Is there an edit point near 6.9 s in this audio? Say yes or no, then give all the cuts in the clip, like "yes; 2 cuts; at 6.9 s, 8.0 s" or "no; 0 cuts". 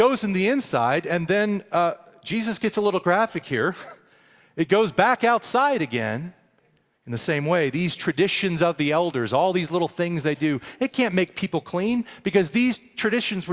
yes; 1 cut; at 6.9 s